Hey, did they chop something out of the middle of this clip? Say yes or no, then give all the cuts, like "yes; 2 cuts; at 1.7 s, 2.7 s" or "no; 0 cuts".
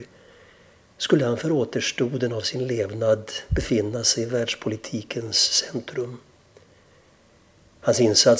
no; 0 cuts